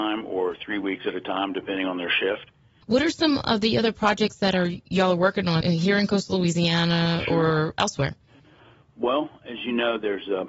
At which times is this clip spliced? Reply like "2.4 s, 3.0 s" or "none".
2.8 s, 5.6 s